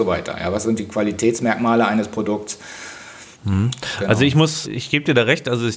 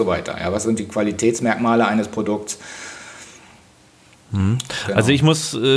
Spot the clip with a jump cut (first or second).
first